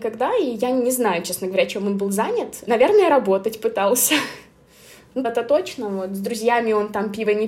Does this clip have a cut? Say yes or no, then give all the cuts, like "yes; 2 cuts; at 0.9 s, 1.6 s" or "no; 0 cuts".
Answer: yes; 1 cut; at 5.2 s